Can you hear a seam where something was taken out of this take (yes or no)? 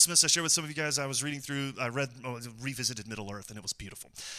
no